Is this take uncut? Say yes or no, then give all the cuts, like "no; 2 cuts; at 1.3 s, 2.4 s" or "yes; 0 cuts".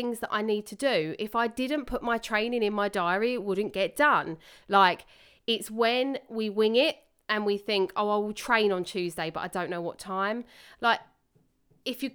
no; 2 cuts; at 4.6 s, 10.8 s